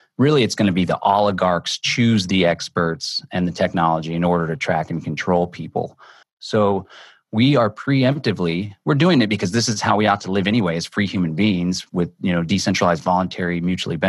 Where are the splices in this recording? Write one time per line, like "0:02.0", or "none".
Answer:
0:06.2